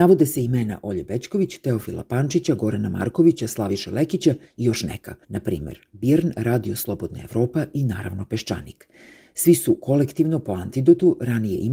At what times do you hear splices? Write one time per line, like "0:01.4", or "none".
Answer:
0:03.4
0:05.2